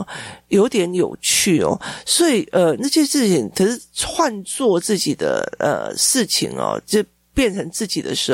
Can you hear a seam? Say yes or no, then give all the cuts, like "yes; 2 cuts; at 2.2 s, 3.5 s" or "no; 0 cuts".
no; 0 cuts